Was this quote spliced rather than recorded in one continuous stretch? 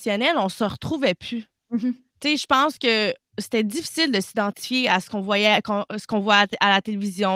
no; 0 cuts

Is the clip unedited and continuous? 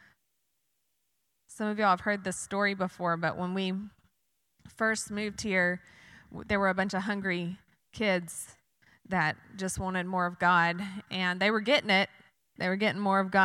yes; 0 cuts

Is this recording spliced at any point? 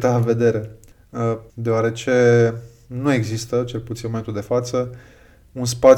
yes; 1 cut; at 1.5 s

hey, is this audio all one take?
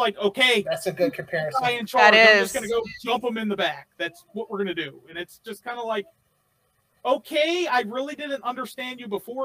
yes; 0 cuts

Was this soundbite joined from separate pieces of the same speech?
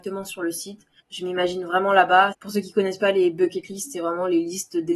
yes; 2 cuts; at 1.0 s, 2.3 s

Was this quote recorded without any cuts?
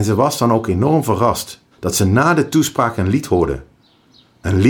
no; 1 cut; at 1.7 s

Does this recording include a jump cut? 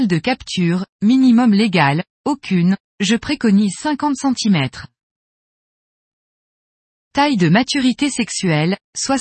no; 0 cuts

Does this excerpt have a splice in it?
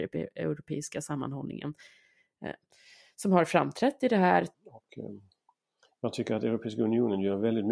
yes; 1 cut; at 4.5 s

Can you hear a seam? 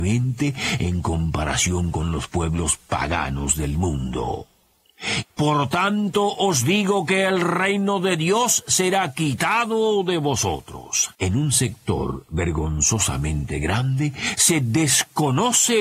yes; 2 cuts; at 5.2 s, 11.1 s

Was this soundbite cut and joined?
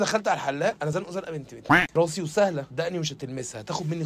no; 0 cuts

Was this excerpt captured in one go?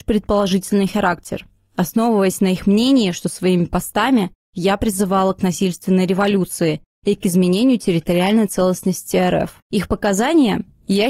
no; 2 cuts; at 3.1 s, 9.6 s

